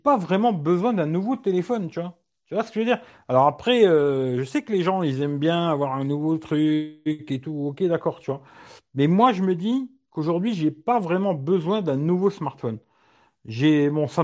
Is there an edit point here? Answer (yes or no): no